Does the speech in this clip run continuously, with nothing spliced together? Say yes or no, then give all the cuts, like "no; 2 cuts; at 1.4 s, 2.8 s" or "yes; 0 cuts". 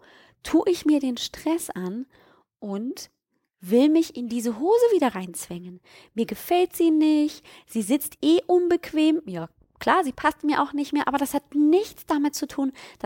yes; 0 cuts